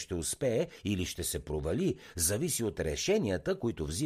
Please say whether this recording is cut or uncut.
uncut